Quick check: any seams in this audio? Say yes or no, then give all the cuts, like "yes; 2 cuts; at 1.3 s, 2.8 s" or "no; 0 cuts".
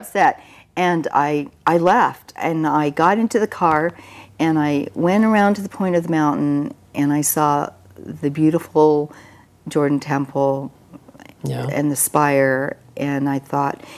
no; 0 cuts